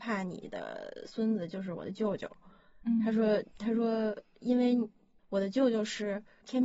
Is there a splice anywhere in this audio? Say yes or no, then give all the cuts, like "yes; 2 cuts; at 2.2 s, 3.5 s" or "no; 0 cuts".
no; 0 cuts